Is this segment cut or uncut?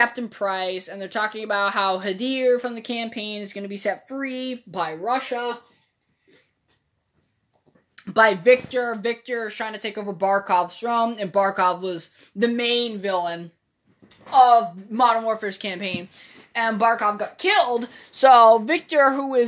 uncut